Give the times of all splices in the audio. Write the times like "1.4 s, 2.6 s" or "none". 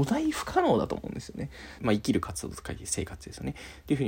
1.8 s